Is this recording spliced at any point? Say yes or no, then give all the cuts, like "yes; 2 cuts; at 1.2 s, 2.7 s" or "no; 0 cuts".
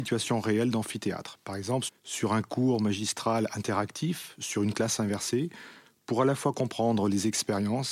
yes; 1 cut; at 1.9 s